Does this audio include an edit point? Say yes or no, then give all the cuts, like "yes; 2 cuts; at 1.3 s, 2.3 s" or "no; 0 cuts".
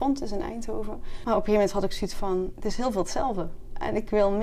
yes; 2 cuts; at 1.2 s, 2.5 s